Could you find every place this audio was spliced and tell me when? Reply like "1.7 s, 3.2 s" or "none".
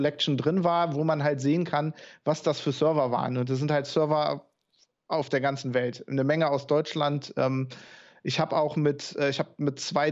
none